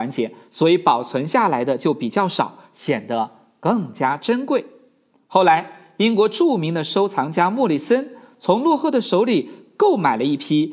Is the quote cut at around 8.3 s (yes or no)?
no